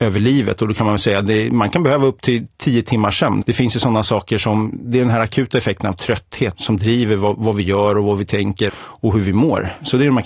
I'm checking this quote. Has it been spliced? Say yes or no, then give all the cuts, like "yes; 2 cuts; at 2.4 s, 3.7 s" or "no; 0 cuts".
yes; 3 cuts; at 3.4 s, 6.5 s, 8.7 s